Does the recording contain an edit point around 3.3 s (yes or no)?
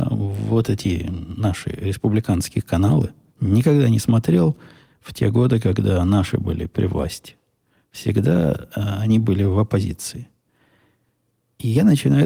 yes